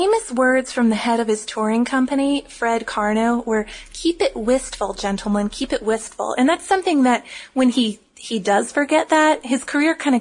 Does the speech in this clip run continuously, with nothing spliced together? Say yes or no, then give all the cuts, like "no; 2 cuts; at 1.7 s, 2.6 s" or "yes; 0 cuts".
yes; 0 cuts